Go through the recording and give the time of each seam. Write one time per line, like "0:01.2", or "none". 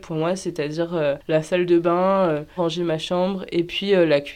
0:02.6

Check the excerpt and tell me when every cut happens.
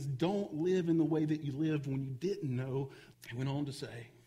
0:03.1

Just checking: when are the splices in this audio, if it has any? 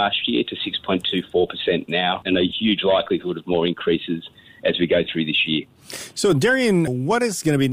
none

